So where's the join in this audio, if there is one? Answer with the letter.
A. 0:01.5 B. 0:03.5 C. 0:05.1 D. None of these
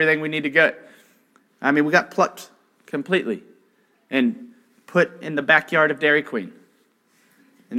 A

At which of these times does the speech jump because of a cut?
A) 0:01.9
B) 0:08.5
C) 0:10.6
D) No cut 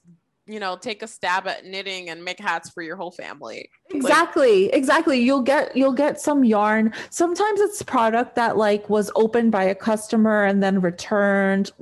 D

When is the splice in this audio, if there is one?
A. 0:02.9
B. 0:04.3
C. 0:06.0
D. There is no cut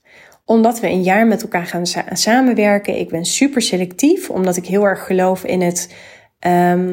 D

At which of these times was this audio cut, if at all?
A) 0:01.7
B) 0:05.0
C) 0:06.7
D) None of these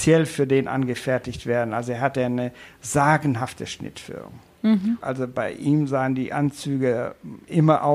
B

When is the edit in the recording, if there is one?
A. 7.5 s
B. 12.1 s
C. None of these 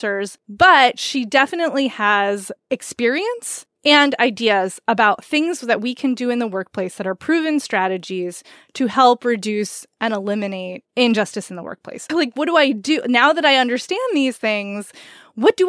B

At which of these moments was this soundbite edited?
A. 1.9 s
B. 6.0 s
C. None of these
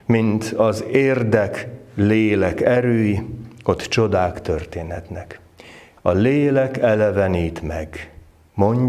B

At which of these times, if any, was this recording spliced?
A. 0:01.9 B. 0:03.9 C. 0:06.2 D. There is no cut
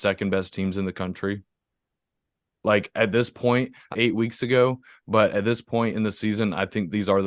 B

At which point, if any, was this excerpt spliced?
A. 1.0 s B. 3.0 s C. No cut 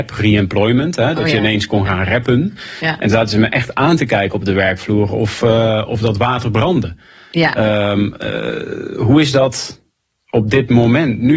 C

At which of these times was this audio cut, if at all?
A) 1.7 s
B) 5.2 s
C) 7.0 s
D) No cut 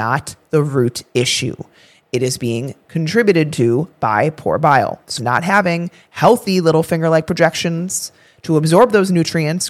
B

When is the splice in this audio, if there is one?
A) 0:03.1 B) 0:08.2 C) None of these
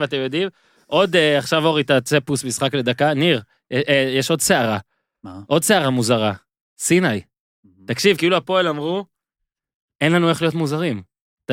C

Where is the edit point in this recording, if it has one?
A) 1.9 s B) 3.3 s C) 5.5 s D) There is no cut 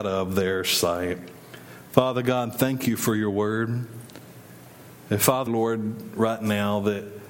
C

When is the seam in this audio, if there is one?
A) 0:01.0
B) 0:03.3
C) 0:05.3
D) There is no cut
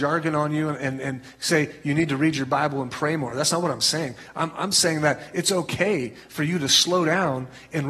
D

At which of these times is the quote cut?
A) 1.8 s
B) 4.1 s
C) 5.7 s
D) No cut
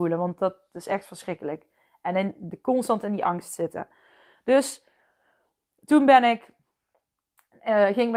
D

